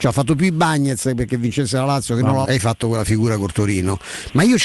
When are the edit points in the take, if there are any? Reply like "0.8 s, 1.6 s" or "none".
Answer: 2.4 s

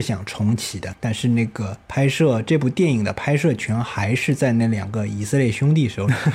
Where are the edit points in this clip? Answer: 0.9 s

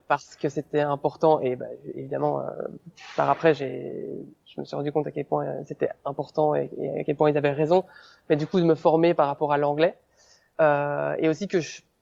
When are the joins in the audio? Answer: none

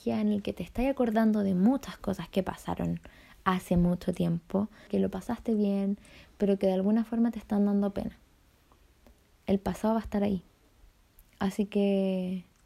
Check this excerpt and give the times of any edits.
4.9 s

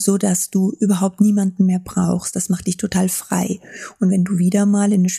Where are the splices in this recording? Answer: none

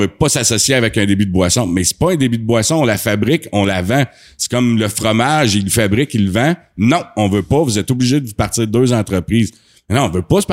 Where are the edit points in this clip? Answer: none

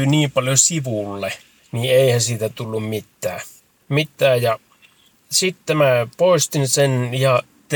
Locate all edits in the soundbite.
none

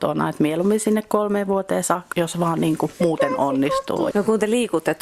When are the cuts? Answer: 2.1 s, 4.1 s

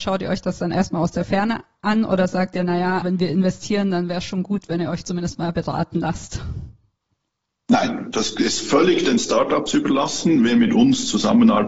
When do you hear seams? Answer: 3.0 s

